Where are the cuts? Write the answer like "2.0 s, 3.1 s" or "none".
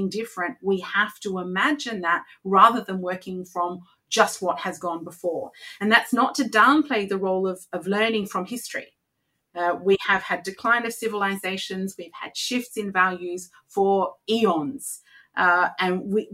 none